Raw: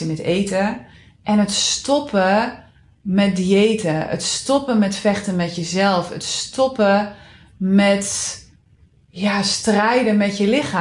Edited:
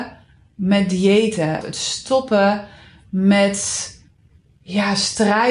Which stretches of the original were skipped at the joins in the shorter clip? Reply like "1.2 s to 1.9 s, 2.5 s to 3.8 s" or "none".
4.1 s to 6.1 s